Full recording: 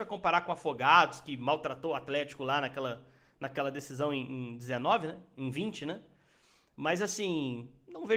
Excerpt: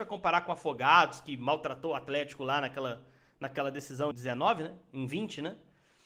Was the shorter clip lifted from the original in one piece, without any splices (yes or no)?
no